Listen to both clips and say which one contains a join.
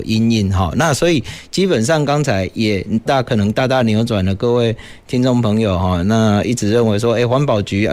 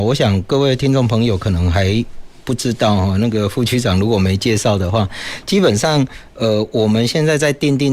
first; 1 cut; at 3.1 s

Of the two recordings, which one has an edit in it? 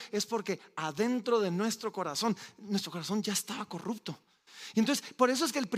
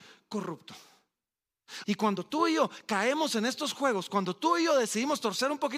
second; 1 cut; at 1.8 s

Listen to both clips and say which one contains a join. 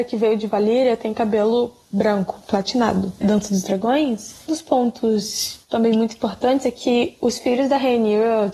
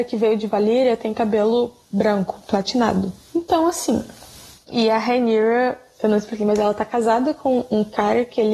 first; 2 cuts; at 3.2 s, 4.5 s

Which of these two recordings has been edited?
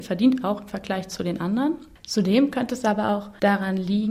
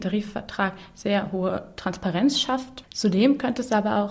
second; 1 cut; at 2.8 s

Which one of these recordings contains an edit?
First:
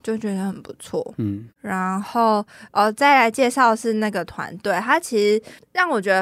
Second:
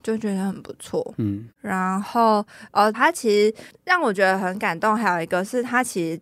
second; 1 cut; at 2.9 s

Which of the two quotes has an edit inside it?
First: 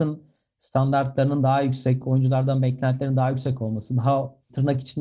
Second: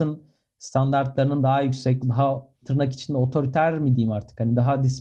second; 1 cut; at 2.0 s

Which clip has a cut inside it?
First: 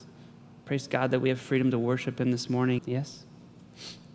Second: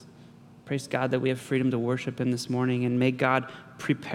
first; 1 cut; at 2.8 s

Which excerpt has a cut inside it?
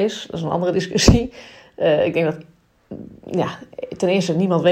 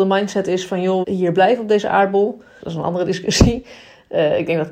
second; 2 cuts; at 1.0 s, 2.6 s

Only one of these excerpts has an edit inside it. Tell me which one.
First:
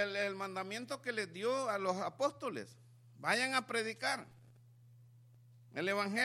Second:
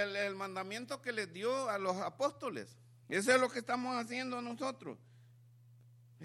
second; 1 cut; at 3.0 s

